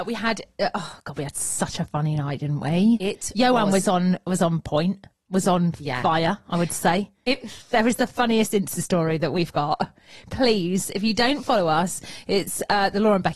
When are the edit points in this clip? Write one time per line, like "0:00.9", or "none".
none